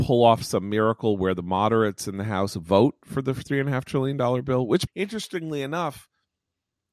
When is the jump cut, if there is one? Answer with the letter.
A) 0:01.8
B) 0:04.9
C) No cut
B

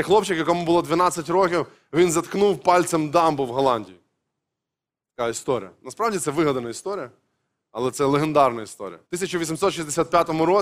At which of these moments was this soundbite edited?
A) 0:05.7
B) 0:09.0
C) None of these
B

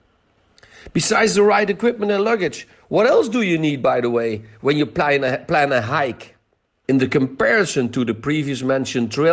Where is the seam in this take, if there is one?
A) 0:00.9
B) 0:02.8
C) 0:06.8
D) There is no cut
C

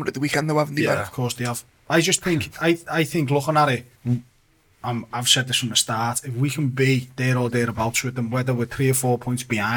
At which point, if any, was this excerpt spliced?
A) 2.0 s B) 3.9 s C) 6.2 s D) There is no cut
B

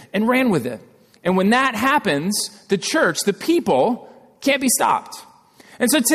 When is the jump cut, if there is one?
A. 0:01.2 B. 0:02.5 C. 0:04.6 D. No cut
D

